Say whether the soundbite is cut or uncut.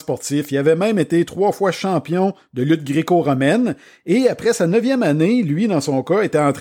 uncut